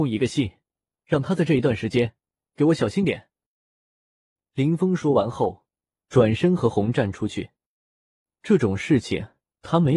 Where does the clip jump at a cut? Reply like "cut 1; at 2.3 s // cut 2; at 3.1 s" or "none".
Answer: none

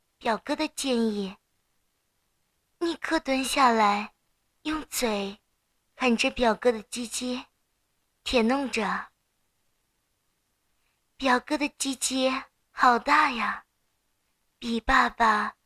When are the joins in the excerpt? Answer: none

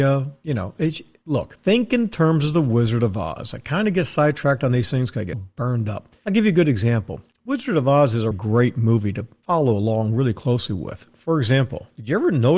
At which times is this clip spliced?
cut 1; at 1.6 s // cut 2; at 5.3 s // cut 3; at 8.3 s

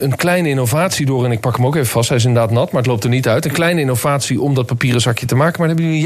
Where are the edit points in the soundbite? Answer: none

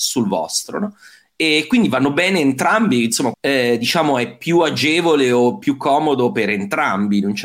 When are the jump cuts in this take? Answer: cut 1; at 3.3 s

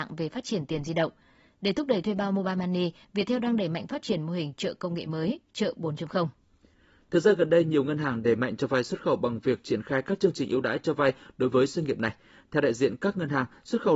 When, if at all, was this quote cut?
none

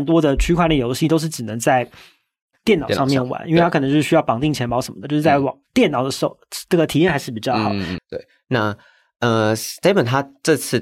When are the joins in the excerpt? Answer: cut 1; at 8.0 s

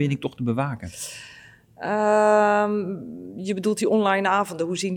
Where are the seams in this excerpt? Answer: none

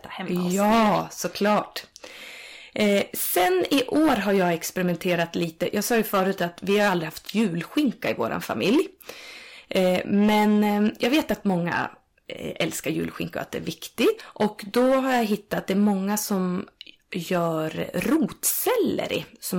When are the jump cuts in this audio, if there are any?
cut 1; at 14.2 s

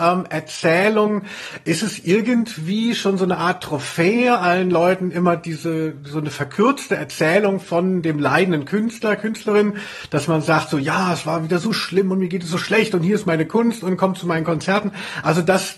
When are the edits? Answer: none

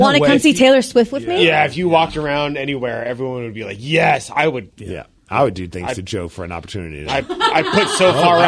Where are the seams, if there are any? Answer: cut 1; at 4.7 s

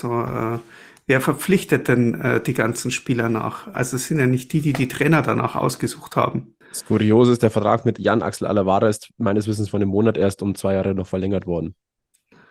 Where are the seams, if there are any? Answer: cut 1; at 3.7 s // cut 2; at 6.6 s

